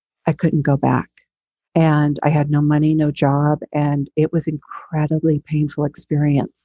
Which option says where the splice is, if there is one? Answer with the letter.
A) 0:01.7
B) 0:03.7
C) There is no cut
A